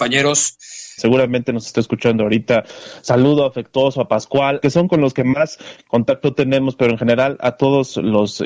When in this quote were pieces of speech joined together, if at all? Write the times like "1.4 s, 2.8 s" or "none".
1.0 s, 4.6 s

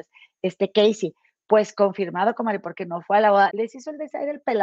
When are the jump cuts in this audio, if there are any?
3.5 s

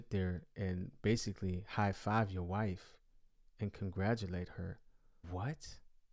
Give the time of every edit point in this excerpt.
5.2 s

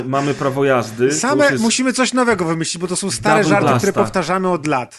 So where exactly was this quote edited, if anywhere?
none

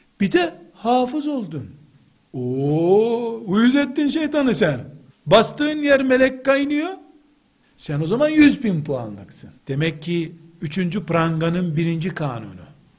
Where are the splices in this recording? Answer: 5.1 s, 7.6 s, 9.6 s

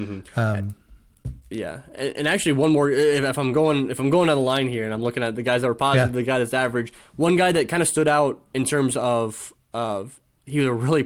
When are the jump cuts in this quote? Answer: none

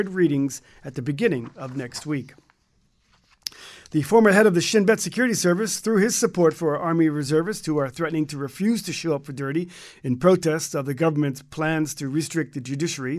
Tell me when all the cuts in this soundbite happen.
none

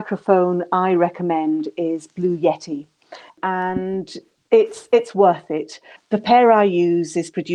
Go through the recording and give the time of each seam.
3.3 s, 6.0 s

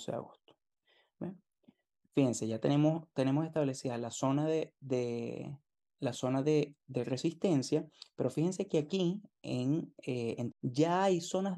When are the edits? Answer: 10.5 s

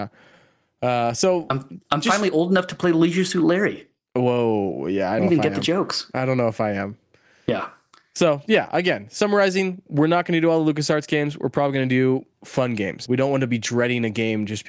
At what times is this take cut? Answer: 5.2 s, 13.1 s

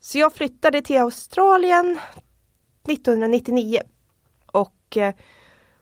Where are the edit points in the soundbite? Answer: none

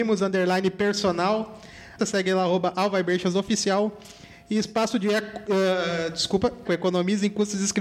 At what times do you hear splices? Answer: 2.0 s, 6.6 s

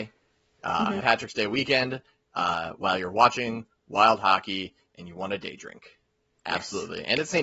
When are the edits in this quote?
1.0 s, 6.3 s

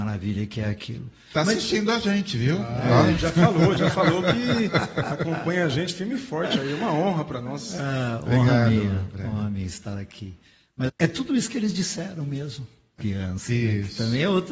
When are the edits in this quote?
10.9 s, 13.0 s

